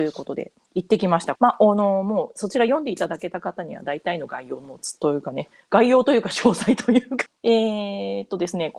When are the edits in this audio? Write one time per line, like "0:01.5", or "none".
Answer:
0:01.4
0:07.3